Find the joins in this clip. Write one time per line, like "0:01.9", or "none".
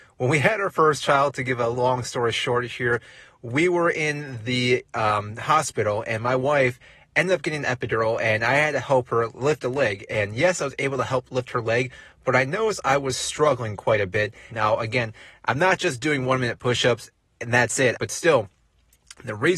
0:10.1
0:14.5
0:17.9